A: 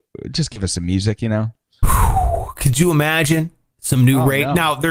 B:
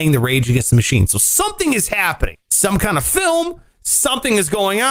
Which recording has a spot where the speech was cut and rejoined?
B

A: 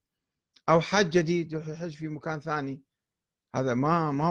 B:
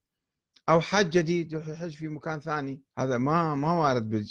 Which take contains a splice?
B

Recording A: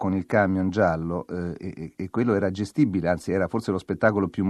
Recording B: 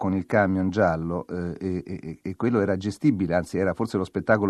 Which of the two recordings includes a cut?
A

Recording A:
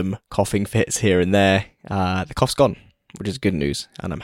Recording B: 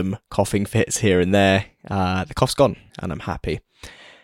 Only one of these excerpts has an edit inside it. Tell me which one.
B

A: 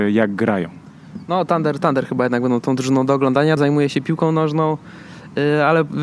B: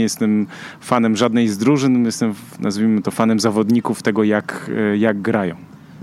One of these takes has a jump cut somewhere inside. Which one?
A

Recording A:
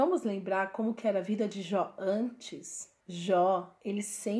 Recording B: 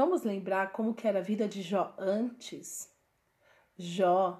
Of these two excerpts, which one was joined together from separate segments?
A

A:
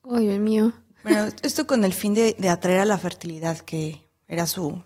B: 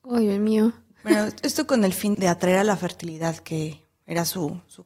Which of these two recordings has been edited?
B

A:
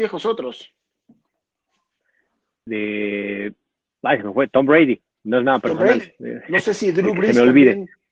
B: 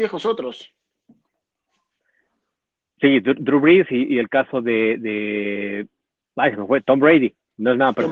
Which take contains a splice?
A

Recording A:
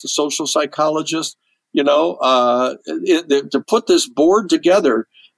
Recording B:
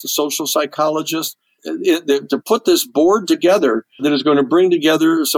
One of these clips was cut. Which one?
B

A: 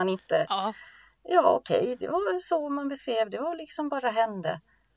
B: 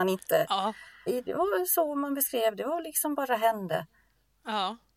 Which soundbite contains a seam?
B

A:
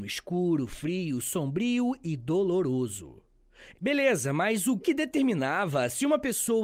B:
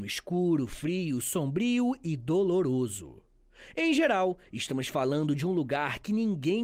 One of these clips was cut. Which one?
A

